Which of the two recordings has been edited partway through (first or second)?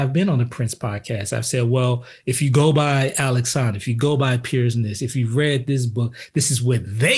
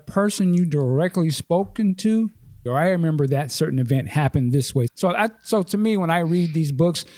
second